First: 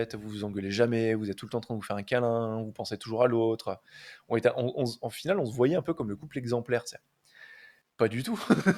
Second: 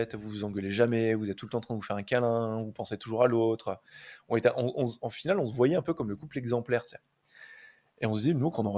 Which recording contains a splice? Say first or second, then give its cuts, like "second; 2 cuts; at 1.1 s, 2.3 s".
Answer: first; 1 cut; at 7.8 s